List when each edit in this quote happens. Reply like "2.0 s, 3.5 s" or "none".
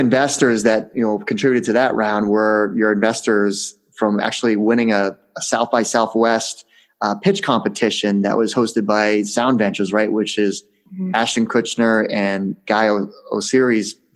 none